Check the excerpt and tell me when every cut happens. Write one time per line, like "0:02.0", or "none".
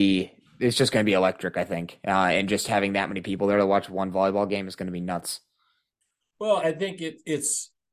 0:06.6